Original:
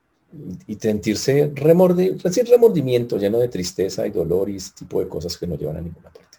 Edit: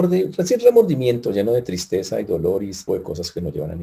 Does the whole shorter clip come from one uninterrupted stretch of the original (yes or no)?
no